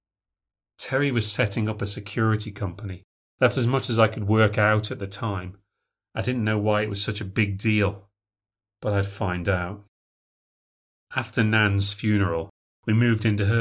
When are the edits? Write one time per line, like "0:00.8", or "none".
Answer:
0:12.7